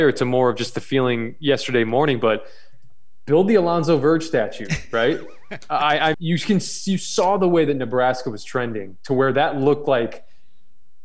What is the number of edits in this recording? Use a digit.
1